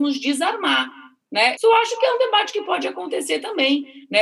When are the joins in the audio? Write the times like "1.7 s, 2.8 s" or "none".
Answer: 1.6 s